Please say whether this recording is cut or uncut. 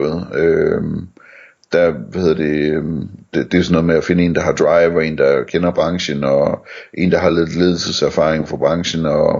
uncut